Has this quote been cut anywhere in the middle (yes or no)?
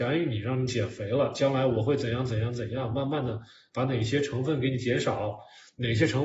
no